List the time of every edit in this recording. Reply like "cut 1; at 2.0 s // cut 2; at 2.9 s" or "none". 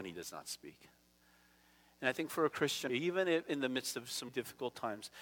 cut 1; at 2.9 s // cut 2; at 4.3 s